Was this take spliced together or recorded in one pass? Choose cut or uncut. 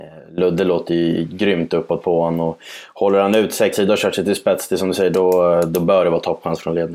cut